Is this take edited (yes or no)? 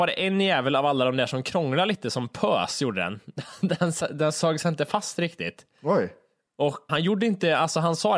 yes